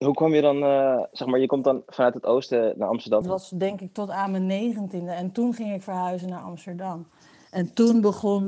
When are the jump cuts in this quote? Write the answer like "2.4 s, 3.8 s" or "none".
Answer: 3.2 s

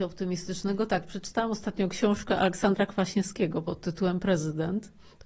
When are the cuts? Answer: none

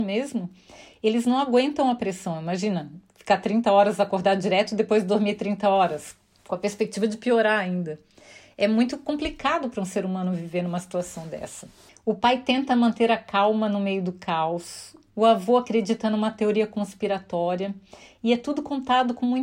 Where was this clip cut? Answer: 11.9 s

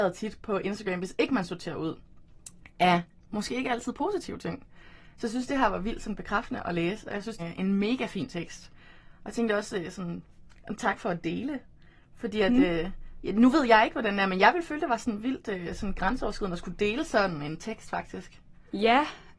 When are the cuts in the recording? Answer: 7.4 s

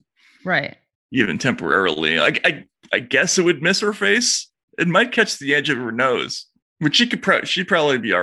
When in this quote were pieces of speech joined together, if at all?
none

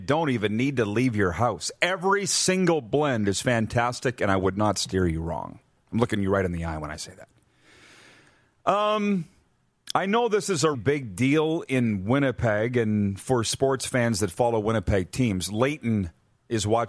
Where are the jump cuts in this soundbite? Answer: 10.7 s

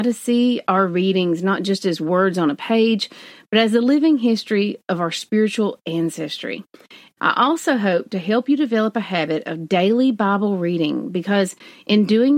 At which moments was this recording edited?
7.2 s

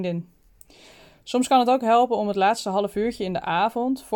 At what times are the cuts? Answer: none

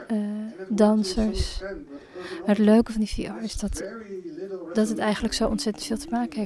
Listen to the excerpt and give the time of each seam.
none

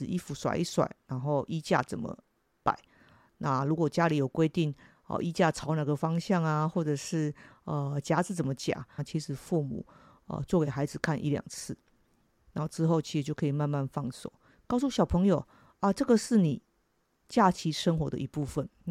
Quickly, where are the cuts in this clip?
9.0 s

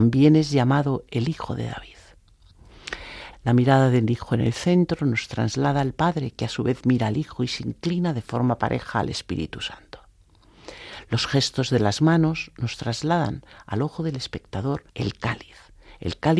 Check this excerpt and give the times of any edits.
3.3 s, 14.9 s

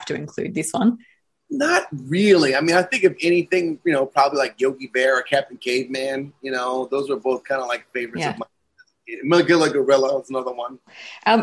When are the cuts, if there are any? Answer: none

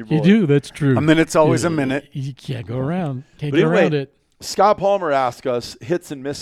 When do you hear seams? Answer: none

